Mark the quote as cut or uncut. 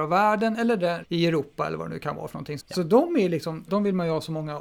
cut